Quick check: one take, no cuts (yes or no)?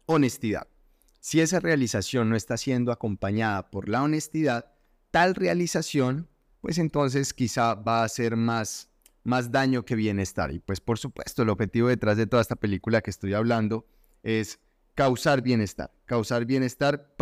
no